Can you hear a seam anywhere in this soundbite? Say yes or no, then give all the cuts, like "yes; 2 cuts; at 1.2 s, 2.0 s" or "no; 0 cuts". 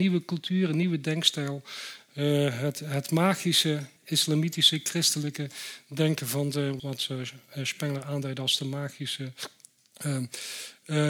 yes; 2 cuts; at 4.0 s, 6.8 s